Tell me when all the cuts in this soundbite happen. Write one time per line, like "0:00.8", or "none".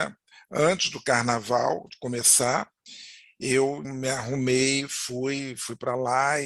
0:03.8